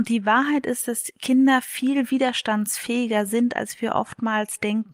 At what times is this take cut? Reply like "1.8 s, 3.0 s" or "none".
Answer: none